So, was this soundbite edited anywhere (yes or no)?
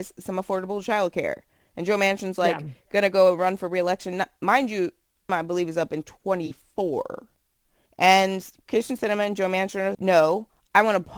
yes